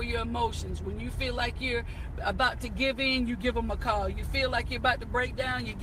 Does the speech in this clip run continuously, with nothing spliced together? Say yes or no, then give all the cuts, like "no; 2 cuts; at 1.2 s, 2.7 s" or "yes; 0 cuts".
yes; 0 cuts